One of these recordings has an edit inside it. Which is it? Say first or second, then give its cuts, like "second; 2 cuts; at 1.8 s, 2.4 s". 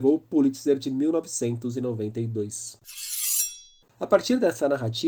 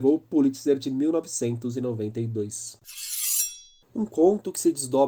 first; 1 cut; at 3.9 s